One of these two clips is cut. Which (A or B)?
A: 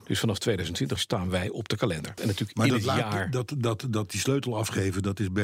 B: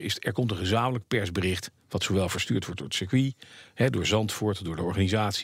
A